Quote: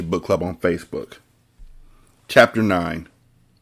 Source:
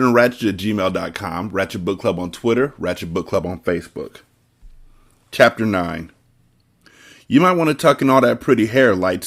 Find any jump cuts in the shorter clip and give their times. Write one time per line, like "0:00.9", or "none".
none